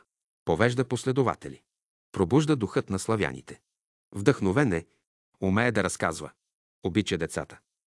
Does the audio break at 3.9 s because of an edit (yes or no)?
yes